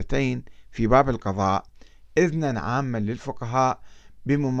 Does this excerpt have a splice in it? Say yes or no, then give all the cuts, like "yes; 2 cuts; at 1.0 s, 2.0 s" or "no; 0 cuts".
no; 0 cuts